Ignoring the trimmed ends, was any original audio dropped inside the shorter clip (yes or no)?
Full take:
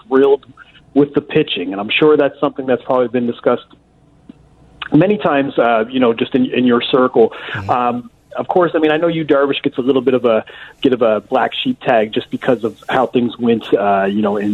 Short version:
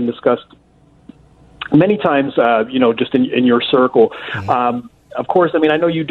no